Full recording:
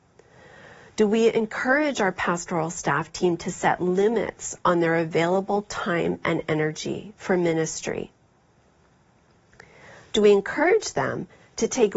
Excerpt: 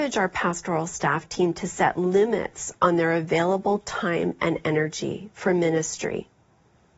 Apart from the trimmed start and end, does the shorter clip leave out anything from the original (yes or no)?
no